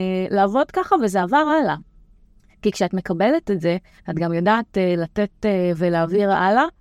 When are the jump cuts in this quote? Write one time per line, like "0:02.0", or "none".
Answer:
none